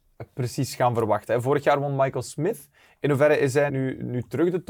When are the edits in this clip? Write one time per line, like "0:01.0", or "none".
0:03.7